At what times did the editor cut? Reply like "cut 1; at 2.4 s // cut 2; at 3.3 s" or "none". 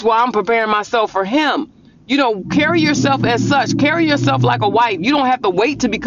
none

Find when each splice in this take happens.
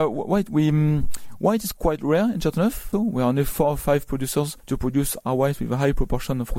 cut 1; at 2.9 s // cut 2; at 4.6 s

